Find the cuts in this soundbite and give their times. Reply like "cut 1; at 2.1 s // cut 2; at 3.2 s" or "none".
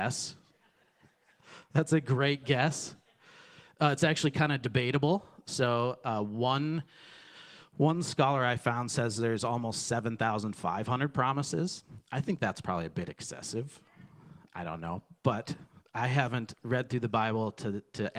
none